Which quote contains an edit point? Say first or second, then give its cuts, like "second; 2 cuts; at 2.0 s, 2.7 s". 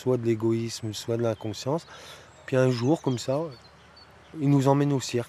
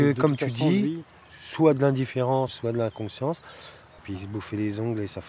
second; 2 cuts; at 2.5 s, 4.0 s